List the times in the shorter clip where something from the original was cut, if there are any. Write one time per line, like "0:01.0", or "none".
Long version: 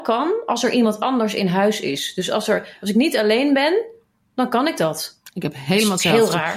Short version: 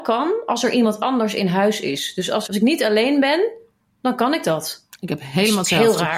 0:02.5